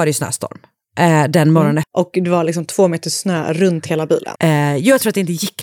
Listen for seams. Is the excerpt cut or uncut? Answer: cut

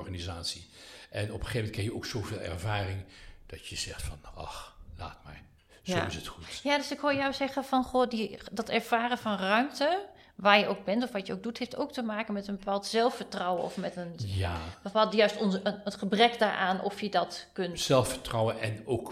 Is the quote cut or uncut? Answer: uncut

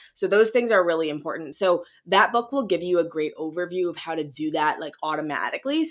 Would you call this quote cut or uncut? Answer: uncut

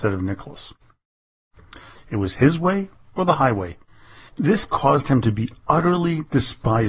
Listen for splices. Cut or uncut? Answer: cut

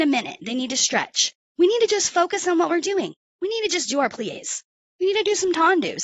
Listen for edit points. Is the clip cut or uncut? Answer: uncut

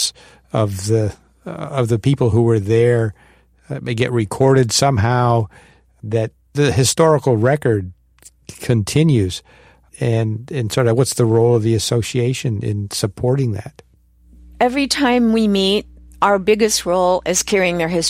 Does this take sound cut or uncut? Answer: cut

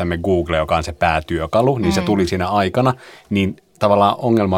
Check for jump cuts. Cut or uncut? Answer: uncut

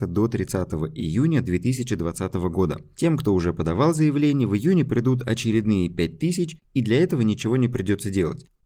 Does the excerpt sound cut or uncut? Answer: cut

